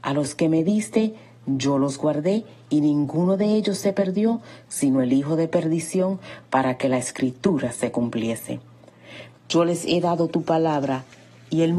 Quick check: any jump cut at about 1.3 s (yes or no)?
no